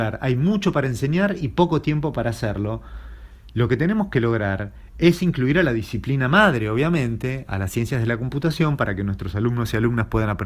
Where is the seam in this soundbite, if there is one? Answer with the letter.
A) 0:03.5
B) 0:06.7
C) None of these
C